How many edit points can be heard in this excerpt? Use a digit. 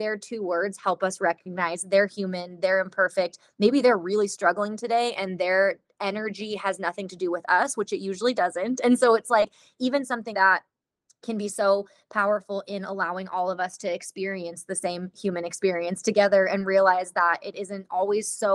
1